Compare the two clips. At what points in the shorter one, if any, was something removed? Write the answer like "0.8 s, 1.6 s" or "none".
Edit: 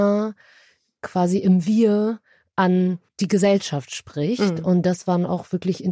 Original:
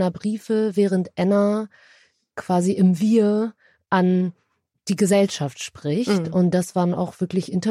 3.1 s

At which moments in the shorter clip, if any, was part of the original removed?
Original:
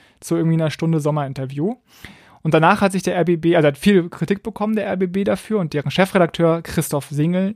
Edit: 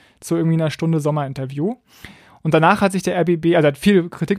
none

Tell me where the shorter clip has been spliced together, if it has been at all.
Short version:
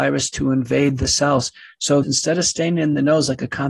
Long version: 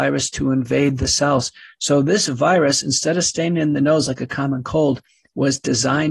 2.0 s

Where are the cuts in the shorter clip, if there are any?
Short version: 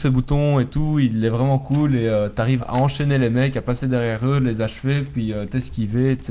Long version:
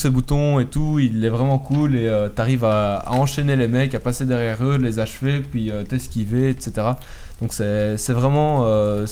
2.6 s

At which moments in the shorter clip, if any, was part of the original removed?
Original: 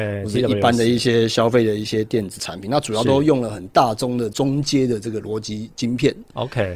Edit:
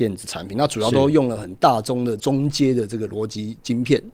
none

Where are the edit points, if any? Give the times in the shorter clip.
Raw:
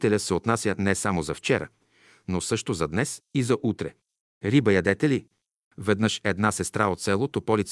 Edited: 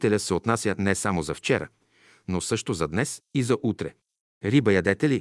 none

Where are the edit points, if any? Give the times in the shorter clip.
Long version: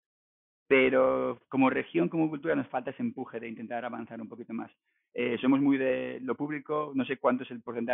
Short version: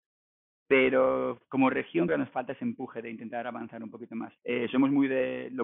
2.1 s, 4.4 s

